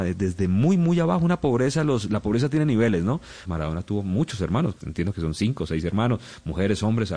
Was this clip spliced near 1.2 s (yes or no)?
no